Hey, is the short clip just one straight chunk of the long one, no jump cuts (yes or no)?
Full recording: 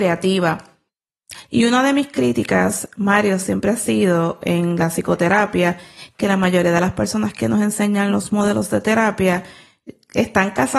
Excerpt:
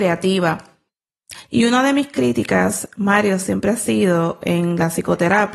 yes